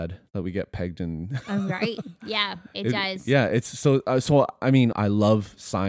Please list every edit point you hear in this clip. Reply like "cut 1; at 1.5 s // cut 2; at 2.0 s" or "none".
cut 1; at 4.9 s